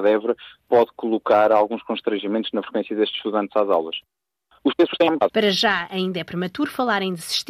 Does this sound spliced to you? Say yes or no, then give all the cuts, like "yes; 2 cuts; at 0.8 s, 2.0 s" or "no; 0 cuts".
yes; 1 cut; at 5.3 s